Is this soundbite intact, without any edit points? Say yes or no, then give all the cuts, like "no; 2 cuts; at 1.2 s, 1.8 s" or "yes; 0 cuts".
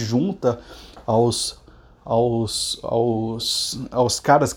yes; 0 cuts